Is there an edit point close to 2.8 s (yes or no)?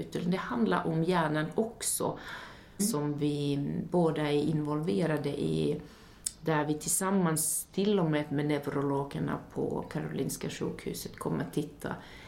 yes